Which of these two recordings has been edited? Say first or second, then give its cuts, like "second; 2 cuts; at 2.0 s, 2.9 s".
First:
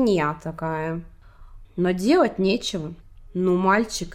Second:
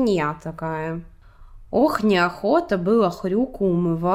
first; 2 cuts; at 1.6 s, 3.0 s